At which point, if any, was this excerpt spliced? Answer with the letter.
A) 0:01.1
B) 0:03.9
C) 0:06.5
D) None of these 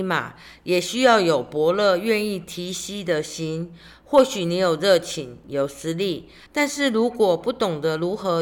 C